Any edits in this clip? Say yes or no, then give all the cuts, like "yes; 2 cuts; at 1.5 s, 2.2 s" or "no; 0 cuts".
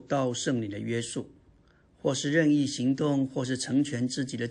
no; 0 cuts